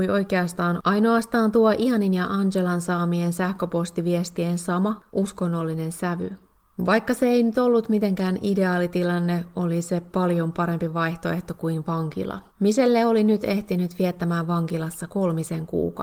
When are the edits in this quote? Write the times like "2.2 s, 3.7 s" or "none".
6.8 s, 12.5 s

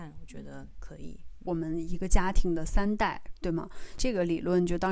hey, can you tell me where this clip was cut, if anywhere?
1.4 s

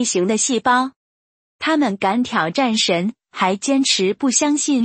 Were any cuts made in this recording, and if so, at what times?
none

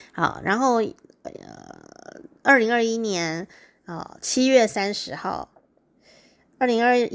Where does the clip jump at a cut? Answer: none

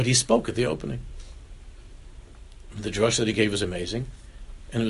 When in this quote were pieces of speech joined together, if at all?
none

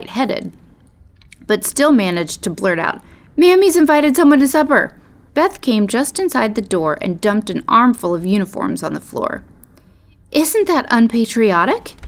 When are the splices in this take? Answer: 5.3 s

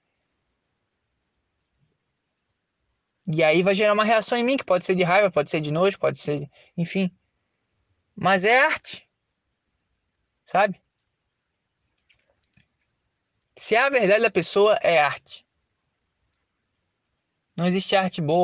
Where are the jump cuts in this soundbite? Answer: none

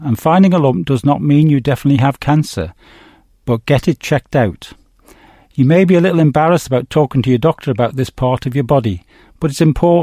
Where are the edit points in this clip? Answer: none

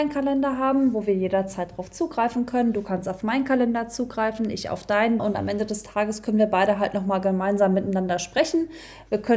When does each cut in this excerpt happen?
5.2 s

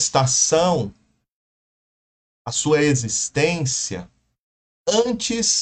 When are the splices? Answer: none

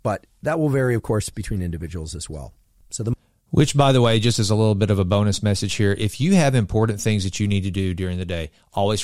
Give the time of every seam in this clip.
none

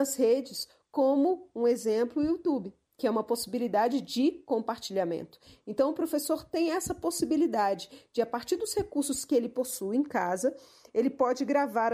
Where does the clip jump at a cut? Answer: none

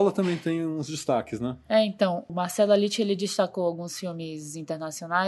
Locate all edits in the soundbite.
2.3 s

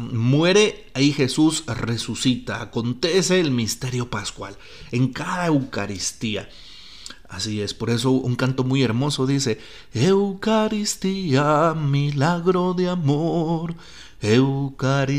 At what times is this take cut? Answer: none

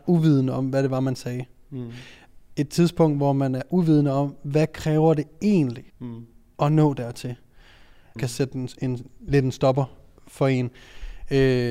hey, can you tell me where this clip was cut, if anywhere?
5.9 s, 8.2 s

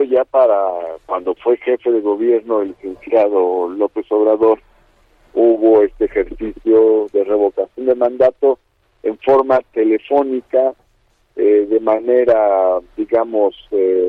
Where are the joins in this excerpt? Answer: none

